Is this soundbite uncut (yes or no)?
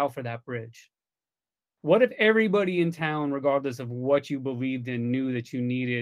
no